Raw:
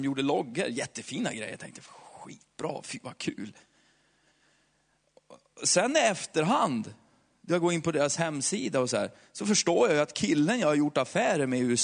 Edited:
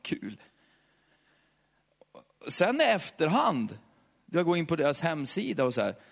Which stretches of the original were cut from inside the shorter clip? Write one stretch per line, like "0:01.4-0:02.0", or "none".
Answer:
none